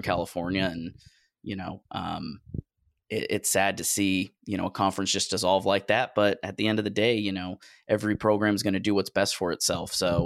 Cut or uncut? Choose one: uncut